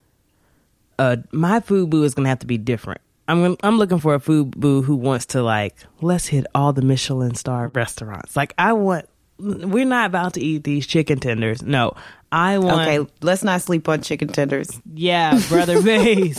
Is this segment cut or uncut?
cut